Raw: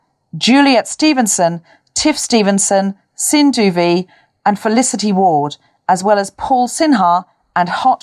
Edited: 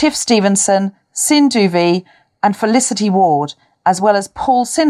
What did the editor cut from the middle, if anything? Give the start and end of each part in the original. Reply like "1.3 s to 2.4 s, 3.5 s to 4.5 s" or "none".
none